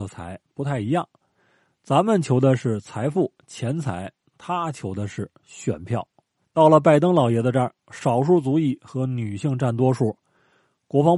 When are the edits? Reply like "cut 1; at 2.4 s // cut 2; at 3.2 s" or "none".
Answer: cut 1; at 6.4 s // cut 2; at 7.8 s